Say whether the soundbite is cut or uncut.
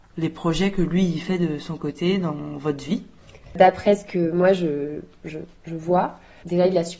uncut